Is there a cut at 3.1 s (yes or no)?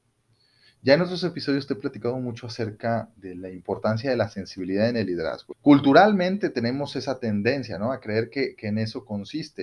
yes